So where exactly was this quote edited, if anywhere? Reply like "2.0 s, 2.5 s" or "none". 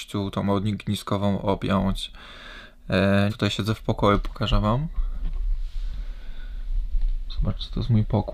3.3 s